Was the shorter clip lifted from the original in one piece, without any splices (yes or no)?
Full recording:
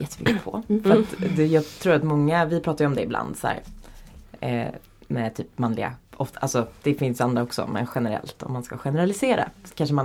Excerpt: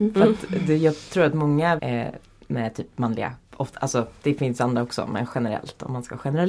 no